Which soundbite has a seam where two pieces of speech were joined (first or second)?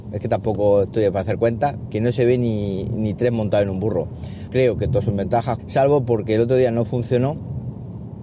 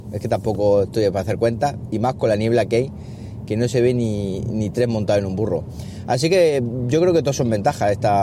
first